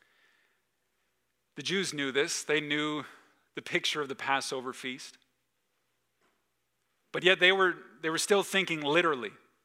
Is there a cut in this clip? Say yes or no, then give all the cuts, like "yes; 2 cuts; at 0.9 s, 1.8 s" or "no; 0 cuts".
no; 0 cuts